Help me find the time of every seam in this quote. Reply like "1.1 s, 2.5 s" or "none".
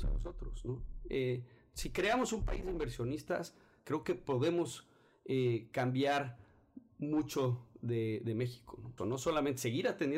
9.0 s